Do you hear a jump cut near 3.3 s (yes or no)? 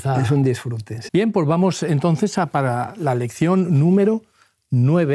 no